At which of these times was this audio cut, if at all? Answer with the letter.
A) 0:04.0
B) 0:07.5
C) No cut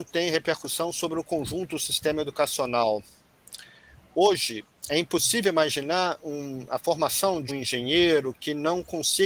B